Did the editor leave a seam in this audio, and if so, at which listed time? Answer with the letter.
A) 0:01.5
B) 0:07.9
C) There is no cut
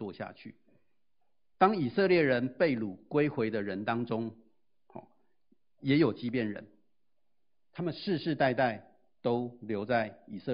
A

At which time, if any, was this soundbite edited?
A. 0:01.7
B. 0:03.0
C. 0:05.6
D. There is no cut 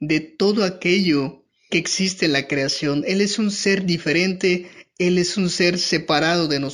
A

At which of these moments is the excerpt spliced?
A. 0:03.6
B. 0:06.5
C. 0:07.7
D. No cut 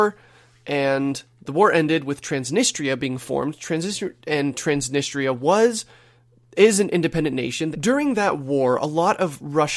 C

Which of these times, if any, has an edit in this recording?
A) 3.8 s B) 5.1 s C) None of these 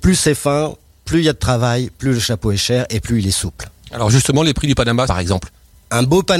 B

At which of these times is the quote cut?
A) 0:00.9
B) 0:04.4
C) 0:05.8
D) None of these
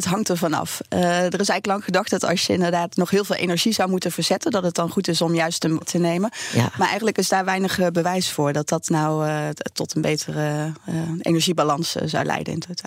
C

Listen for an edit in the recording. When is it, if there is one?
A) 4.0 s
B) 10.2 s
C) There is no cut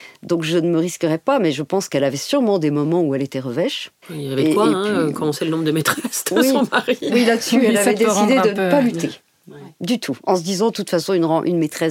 A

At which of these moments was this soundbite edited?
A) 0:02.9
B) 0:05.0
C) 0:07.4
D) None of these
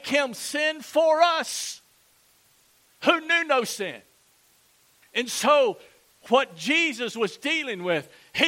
B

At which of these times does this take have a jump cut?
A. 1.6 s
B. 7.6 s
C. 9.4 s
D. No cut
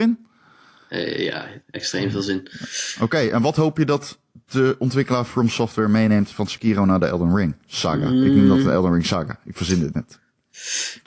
A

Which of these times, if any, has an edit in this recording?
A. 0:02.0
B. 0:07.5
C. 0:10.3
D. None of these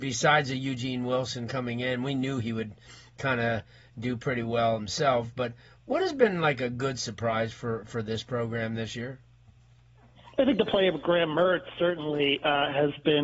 D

